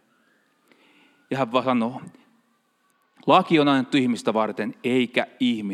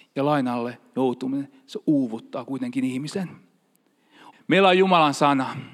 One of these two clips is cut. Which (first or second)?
second